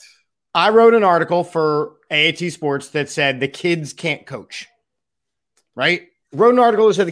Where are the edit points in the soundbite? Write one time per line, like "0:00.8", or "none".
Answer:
0:06.2